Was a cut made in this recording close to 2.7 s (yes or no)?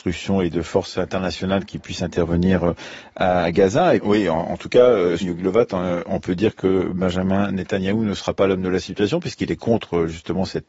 no